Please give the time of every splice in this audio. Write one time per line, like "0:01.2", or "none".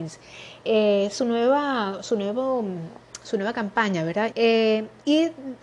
0:04.3